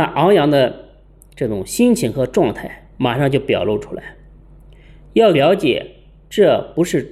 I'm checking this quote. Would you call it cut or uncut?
uncut